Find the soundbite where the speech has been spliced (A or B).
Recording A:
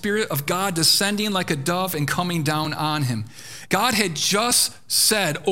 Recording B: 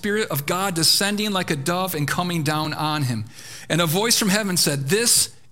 A